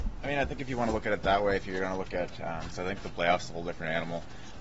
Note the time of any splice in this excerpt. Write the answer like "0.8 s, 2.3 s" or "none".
2.7 s